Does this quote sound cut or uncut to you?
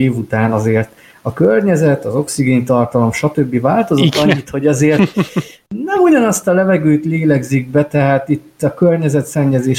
uncut